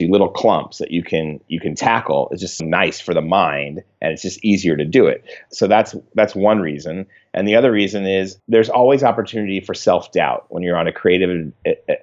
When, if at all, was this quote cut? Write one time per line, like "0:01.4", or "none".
0:02.6